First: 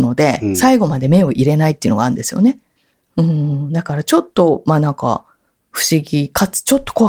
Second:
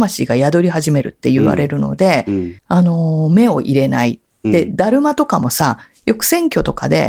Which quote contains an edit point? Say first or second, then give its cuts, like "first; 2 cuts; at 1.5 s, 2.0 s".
second; 1 cut; at 2.6 s